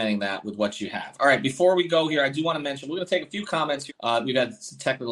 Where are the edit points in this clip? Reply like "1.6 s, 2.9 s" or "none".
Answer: 3.9 s